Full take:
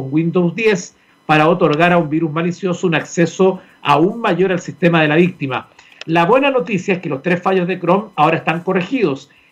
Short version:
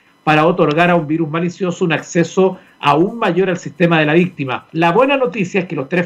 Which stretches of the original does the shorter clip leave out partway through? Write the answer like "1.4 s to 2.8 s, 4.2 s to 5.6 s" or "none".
5.7 s to 6.0 s